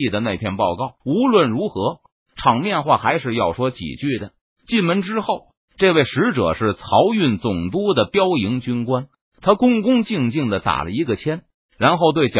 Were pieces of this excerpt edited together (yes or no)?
yes